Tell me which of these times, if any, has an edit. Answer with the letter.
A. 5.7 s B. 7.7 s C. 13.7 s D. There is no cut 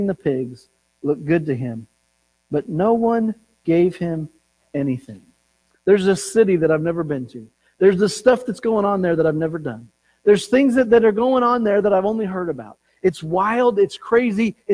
A